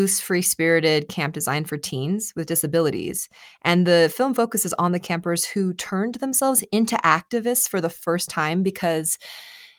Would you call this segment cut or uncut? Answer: uncut